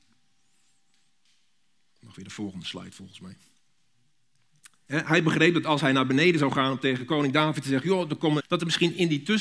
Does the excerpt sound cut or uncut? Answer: cut